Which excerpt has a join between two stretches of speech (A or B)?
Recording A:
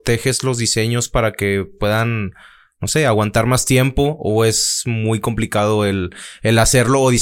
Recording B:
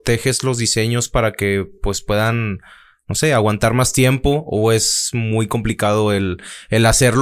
A